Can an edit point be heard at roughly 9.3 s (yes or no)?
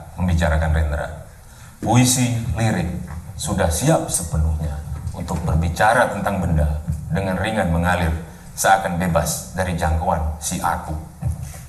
no